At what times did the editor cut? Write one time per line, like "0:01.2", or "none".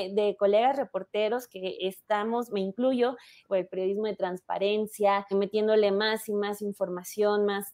0:03.4
0:05.3

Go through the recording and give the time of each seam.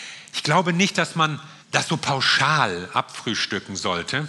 0:01.6

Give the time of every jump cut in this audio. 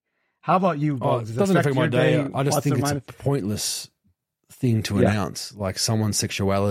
none

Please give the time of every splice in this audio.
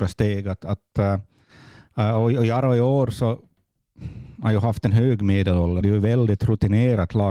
0:05.8

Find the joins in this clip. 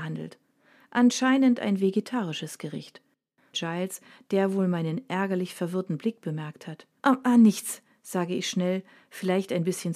0:03.5
0:07.0

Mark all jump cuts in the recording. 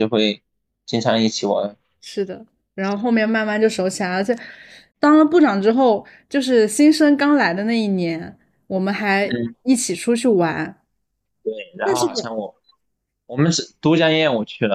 none

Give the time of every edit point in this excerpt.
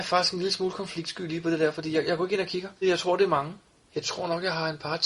0:02.8

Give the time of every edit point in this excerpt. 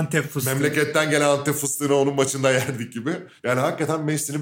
0:03.4

